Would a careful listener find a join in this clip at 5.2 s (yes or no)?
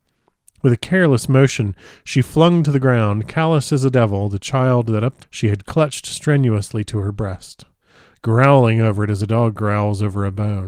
yes